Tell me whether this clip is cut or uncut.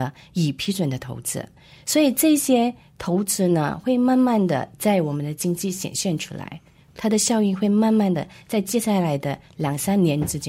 uncut